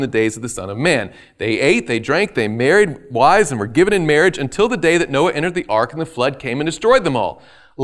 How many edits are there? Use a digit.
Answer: 0